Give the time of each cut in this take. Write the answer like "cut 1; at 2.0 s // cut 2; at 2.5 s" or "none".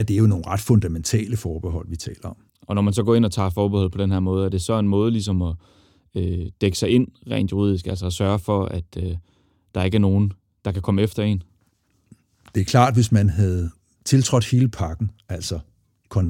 cut 1; at 2.5 s